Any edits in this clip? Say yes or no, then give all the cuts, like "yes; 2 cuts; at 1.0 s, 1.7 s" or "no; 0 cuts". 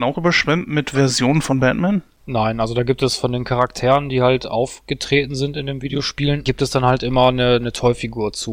no; 0 cuts